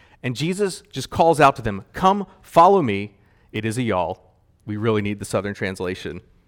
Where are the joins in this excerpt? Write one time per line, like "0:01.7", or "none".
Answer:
0:03.5